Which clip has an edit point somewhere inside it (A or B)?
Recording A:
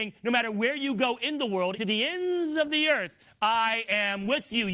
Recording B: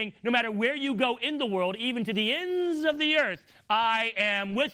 A